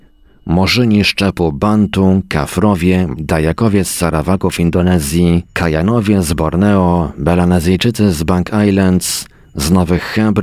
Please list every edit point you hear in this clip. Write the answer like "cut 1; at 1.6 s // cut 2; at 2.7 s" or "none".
cut 1; at 3.2 s